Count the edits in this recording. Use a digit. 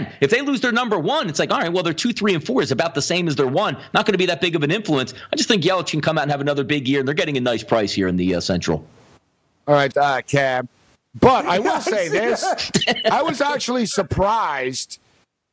1